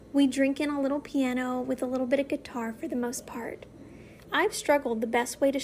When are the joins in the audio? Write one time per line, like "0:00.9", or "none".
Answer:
0:04.2